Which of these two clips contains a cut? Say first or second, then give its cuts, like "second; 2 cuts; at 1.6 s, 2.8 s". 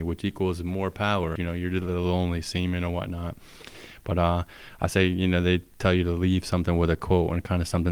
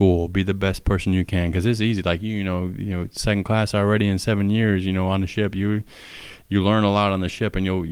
first; 1 cut; at 1.4 s